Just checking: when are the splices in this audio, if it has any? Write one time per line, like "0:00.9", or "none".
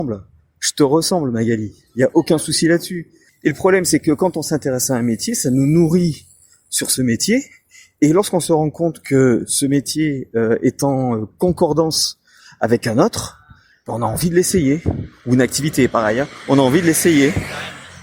0:03.3